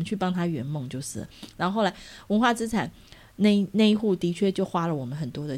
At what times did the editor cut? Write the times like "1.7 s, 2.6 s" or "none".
none